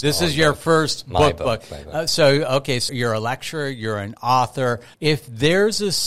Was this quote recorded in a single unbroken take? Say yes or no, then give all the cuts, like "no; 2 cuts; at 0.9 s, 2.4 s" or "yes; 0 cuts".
no; 2 cuts; at 2.9 s, 4.9 s